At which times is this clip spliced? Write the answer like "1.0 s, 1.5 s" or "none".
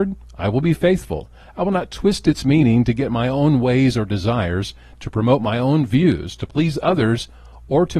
none